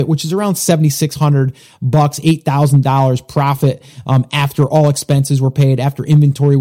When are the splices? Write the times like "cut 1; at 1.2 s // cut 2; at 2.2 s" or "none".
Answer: none

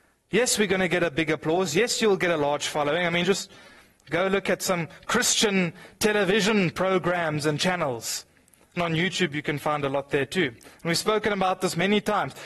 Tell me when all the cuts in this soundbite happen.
cut 1; at 8.8 s

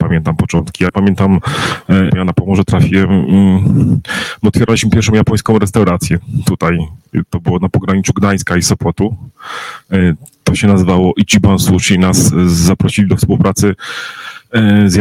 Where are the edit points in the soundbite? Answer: cut 1; at 2.1 s

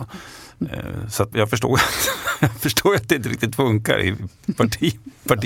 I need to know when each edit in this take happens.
cut 1; at 1.3 s

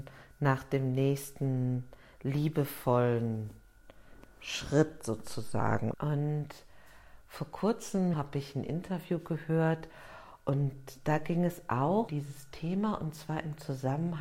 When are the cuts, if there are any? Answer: cut 1; at 5.9 s // cut 2; at 8.1 s // cut 3; at 12.1 s

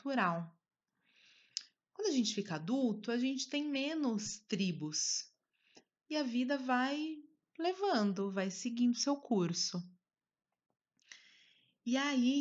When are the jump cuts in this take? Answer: none

